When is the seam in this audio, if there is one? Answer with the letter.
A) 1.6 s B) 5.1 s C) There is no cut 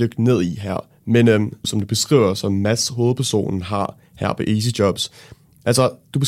A